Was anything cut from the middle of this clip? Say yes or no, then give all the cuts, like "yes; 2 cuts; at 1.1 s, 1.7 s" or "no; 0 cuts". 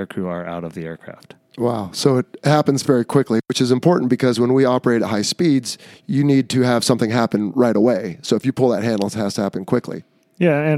no; 0 cuts